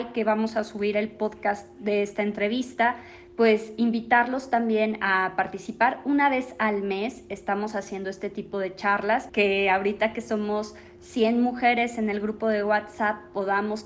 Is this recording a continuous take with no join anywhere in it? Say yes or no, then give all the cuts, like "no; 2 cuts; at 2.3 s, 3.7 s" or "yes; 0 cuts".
no; 1 cut; at 9.3 s